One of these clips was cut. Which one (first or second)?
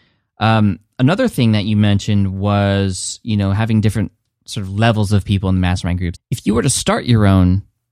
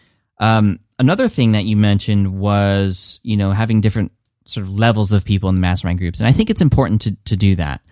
first